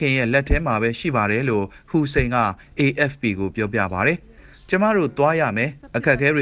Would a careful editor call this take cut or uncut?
uncut